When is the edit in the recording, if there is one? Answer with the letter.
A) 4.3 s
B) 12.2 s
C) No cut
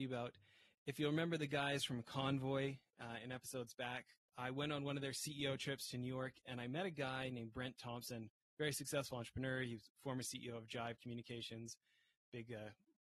A